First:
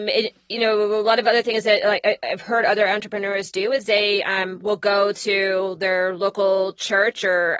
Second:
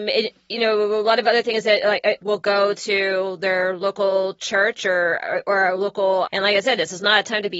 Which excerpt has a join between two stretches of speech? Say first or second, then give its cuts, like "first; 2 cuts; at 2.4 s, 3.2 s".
second; 2 cuts; at 2.2 s, 6.3 s